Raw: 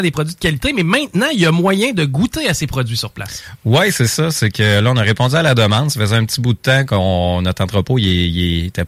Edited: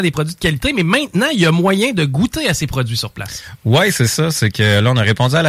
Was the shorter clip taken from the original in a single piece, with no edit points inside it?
yes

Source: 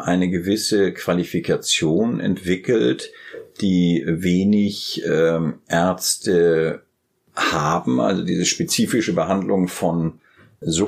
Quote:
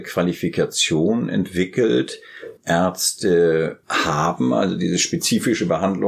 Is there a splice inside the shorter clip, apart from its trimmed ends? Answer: yes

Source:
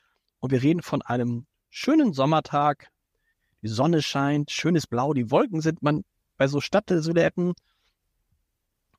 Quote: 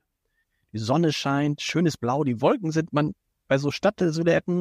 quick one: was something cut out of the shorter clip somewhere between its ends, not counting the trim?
no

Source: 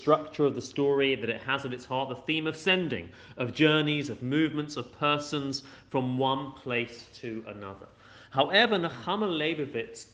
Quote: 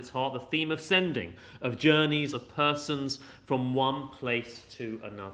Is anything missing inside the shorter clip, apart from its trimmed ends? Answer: yes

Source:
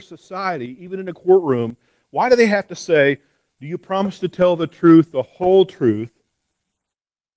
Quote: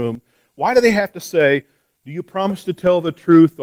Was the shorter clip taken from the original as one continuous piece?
yes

